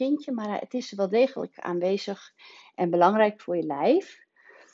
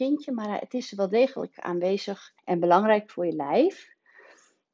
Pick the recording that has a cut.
second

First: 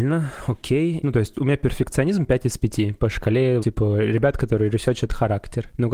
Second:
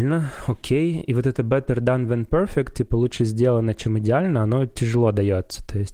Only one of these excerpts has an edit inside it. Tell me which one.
first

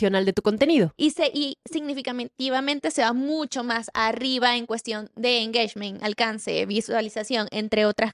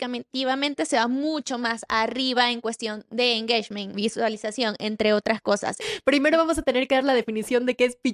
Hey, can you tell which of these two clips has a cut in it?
second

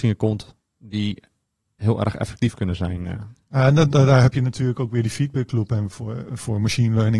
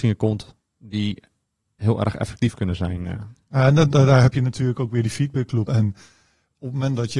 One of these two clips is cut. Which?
second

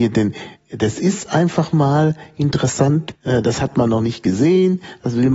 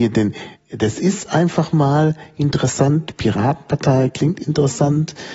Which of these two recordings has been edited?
first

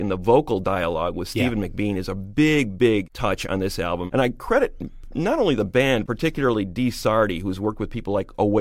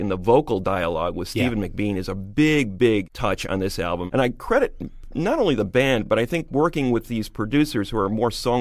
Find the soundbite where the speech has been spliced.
first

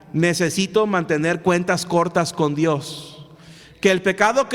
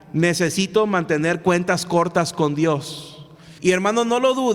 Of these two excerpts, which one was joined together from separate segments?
second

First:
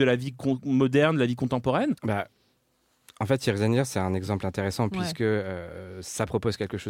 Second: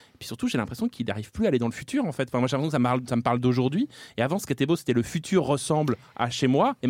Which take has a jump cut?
first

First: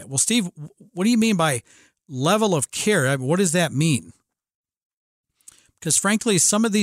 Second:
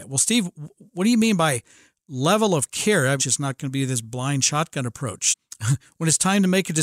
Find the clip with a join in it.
second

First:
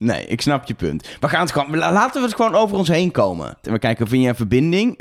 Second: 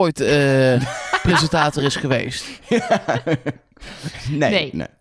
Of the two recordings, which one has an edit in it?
first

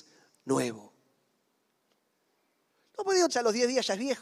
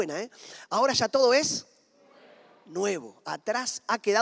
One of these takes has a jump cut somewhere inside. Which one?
first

